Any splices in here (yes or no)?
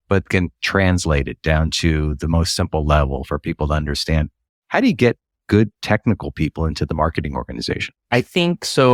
no